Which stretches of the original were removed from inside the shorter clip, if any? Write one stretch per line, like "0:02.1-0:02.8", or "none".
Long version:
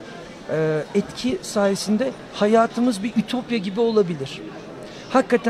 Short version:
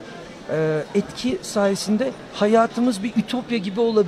none

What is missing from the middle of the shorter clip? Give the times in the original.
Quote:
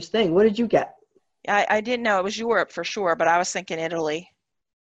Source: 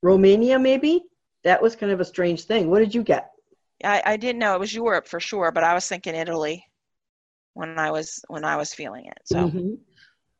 none

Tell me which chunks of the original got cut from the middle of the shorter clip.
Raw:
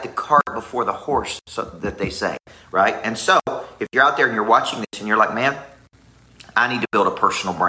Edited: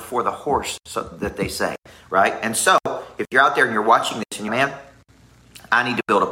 0:05.1-0:05.3

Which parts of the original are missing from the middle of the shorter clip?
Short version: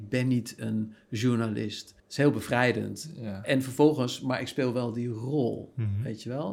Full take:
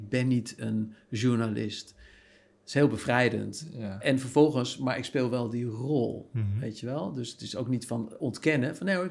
0:02.0-0:02.6

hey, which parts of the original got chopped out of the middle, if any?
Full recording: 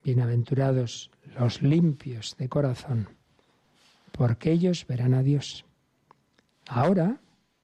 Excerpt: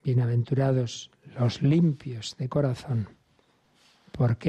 none

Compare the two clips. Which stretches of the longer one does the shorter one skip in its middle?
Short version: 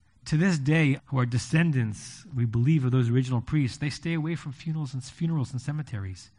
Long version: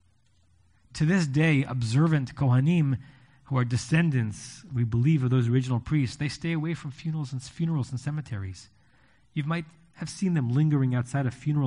0:01.6-0:03.3

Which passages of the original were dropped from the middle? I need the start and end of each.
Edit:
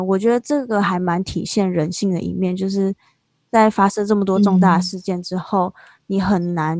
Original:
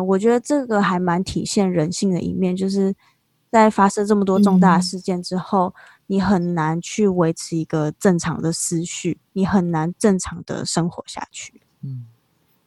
none

